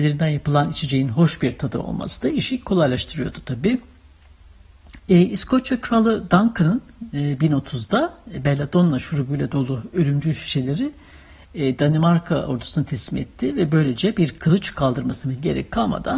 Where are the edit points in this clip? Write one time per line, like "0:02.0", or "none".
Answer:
none